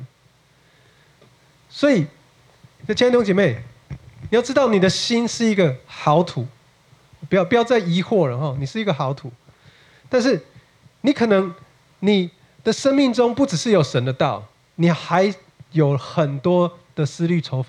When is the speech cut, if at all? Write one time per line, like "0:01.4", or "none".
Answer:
0:02.8